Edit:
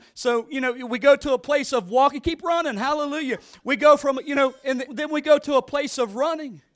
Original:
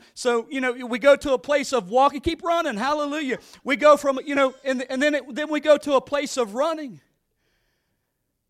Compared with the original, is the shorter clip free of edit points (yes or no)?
no